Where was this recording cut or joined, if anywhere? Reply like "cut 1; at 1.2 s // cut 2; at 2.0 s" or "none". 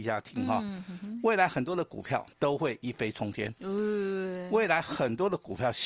cut 1; at 2.3 s